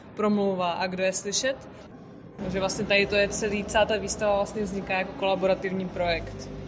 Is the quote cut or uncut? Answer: cut